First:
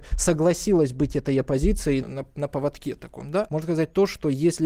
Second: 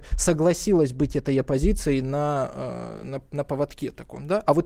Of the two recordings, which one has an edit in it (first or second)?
first